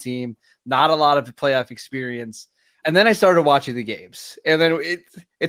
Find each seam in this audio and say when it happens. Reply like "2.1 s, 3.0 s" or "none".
2.8 s